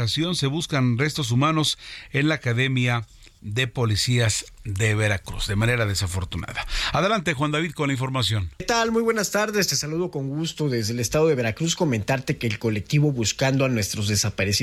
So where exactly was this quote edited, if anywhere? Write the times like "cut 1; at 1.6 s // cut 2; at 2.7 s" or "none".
cut 1; at 8.6 s